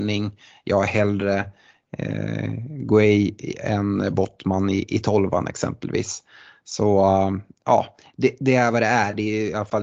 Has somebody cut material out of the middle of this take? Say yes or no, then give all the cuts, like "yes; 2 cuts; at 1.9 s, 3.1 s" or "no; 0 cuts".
no; 0 cuts